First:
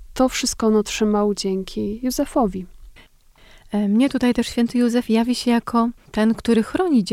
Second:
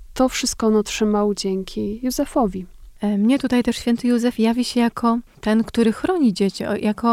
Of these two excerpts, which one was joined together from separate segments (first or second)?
second